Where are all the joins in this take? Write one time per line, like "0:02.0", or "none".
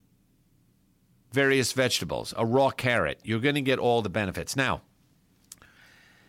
0:03.2